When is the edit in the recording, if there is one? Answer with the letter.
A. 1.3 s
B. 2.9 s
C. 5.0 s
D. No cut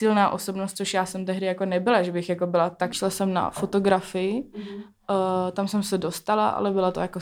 B